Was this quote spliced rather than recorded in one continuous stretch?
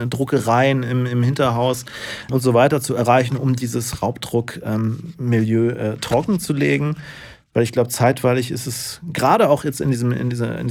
yes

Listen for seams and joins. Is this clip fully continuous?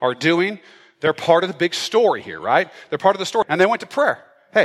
no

